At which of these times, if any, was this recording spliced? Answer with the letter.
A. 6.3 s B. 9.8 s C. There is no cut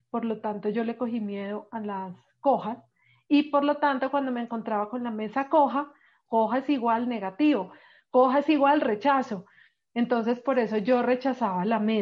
A